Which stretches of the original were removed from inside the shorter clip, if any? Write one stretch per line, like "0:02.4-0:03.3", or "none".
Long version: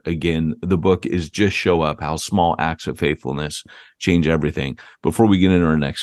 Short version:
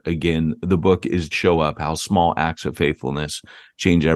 0:01.3-0:01.5